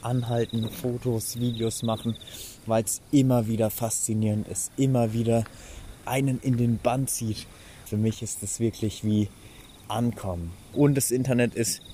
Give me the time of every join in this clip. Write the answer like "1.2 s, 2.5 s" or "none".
5.9 s, 7.9 s, 10.7 s

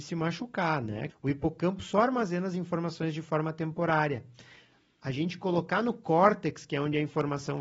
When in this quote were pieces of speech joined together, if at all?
1.1 s

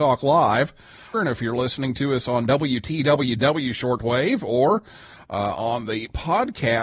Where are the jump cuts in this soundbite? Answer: 1.1 s

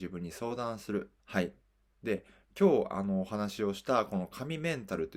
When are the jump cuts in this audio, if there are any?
1.2 s

